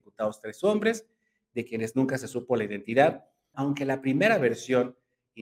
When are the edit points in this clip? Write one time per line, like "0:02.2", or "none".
0:03.5